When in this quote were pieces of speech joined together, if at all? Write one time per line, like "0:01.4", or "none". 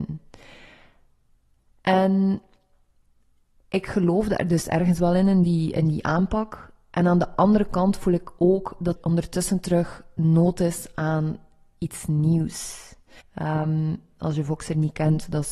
0:09.0
0:13.2